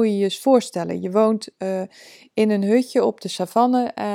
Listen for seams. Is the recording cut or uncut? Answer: uncut